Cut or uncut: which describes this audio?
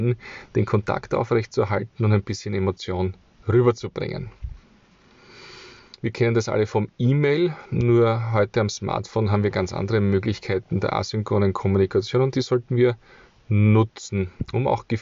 uncut